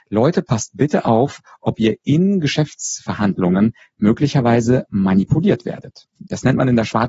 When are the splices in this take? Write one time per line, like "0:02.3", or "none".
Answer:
0:06.2